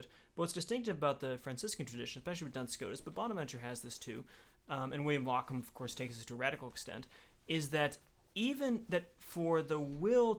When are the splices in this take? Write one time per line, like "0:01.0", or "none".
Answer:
none